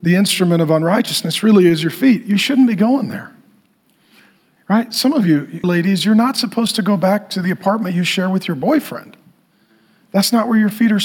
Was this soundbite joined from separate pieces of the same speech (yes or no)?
yes